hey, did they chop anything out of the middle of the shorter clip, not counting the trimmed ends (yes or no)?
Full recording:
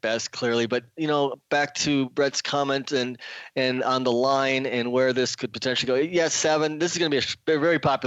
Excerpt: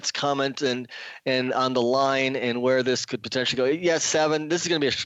no